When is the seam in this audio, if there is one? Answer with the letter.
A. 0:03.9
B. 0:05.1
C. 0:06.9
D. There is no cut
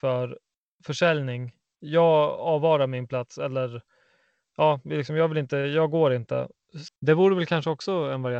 C